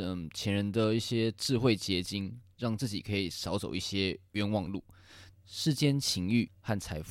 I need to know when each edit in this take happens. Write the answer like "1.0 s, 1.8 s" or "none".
5.3 s